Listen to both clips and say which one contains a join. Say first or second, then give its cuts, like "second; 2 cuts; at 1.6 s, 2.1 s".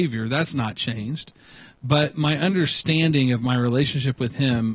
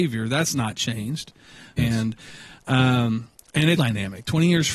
second; 2 cuts; at 1.8 s, 3.8 s